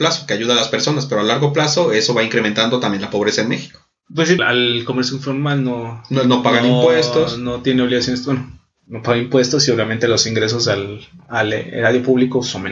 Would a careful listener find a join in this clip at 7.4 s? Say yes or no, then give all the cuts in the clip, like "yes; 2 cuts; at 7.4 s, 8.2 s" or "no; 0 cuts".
no; 1 cut; at 4.4 s